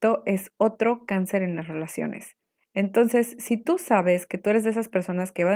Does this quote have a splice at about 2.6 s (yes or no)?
yes